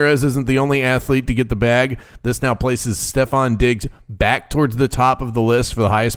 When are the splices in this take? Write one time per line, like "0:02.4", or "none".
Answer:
0:02.2